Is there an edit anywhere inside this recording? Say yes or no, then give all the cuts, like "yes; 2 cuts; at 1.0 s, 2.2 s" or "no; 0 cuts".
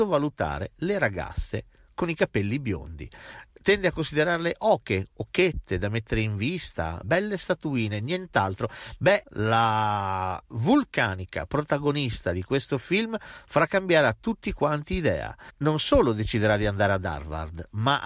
yes; 2 cuts; at 7.0 s, 9.2 s